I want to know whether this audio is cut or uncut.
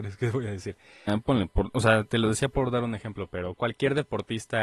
cut